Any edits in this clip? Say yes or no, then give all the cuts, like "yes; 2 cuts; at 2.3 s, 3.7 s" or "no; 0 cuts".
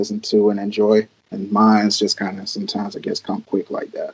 yes; 1 cut; at 1.3 s